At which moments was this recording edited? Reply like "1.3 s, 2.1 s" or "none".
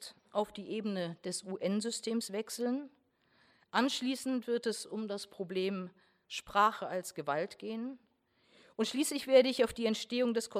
none